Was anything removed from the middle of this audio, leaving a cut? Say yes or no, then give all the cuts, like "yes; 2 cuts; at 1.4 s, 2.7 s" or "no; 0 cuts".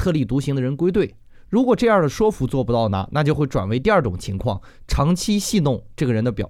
no; 0 cuts